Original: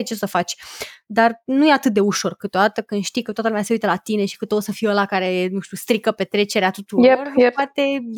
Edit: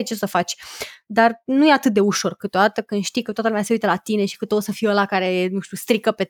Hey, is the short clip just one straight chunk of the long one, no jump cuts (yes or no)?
yes